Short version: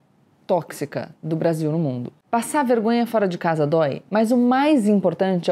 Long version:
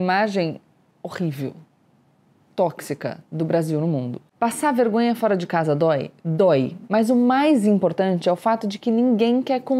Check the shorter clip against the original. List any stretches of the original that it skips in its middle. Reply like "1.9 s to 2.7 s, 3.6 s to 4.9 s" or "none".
6.2 s to 6.9 s